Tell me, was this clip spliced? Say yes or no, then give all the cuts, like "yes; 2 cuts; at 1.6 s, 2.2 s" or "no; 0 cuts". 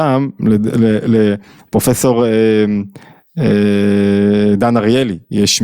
no; 0 cuts